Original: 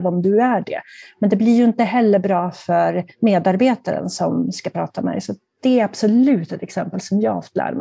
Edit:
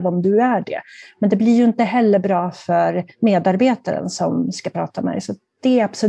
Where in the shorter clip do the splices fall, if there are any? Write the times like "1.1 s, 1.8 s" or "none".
none